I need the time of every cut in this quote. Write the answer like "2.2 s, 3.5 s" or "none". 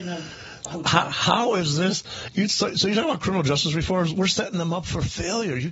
4.1 s